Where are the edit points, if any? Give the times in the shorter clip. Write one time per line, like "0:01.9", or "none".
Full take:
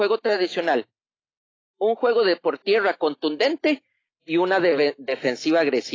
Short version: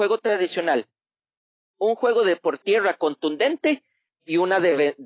none